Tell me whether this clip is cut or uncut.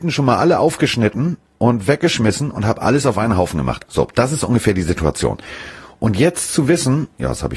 cut